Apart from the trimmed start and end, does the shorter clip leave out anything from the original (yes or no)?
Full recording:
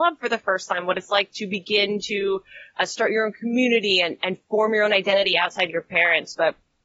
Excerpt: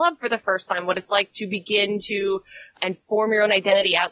yes